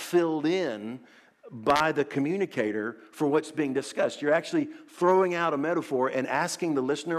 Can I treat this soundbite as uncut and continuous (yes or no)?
yes